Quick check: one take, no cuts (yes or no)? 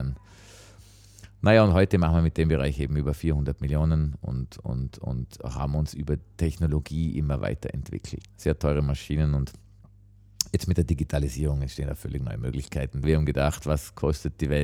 no